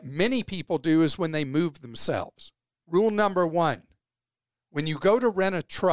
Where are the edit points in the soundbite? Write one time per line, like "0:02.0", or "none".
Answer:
0:02.8

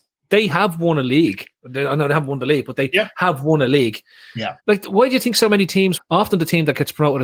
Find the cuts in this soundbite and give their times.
0:04.6
0:06.0

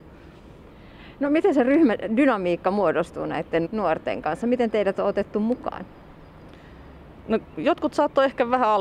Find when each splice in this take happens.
0:03.6

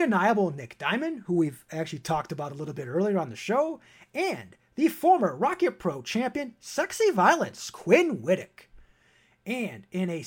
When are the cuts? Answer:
none

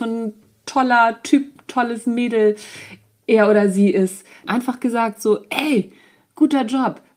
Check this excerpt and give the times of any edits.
0:04.5

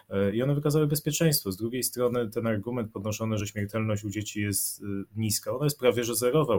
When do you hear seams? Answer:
none

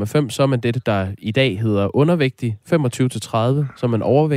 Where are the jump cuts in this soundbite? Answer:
0:02.6

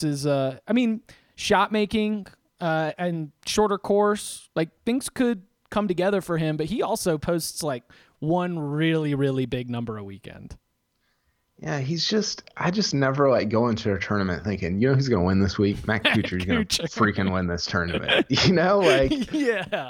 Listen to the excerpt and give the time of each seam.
none

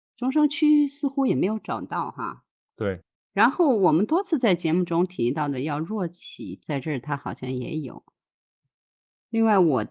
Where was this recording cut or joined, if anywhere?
none

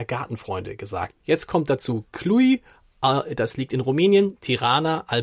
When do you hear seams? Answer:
0:01.2

